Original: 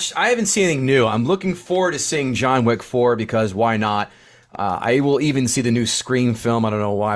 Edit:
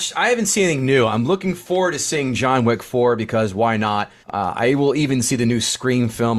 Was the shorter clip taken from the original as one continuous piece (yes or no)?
no